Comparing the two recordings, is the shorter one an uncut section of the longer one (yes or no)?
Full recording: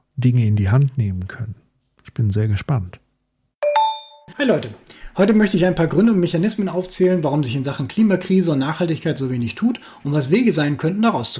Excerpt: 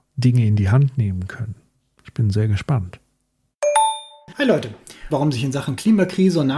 no